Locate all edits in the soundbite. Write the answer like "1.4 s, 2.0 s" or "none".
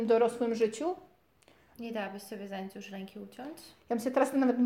1.7 s